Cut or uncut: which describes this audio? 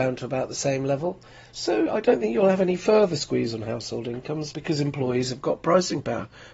cut